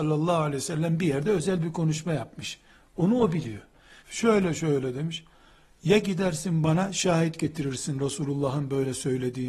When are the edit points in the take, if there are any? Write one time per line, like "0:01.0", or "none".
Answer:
0:04.0